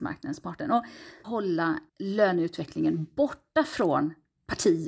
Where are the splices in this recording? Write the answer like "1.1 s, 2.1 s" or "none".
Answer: 1.9 s